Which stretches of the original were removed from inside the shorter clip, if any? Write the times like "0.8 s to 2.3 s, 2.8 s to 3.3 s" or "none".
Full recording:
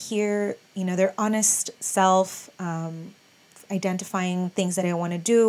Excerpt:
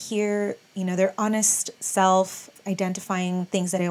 2.6 s to 3.6 s